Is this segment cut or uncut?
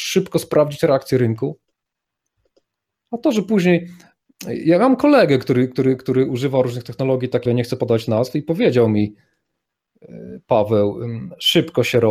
cut